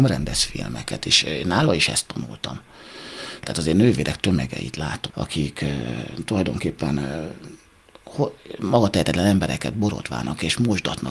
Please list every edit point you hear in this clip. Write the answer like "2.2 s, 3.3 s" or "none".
3.4 s, 5.1 s